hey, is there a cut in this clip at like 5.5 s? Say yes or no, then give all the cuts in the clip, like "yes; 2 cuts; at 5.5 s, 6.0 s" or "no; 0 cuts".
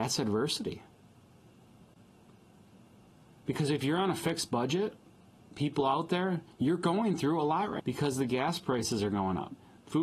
no; 1 cut; at 7.8 s